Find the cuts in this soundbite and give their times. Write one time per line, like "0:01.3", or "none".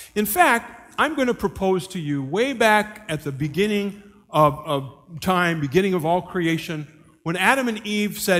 none